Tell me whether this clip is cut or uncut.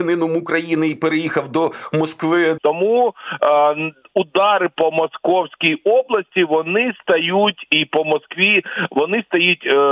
cut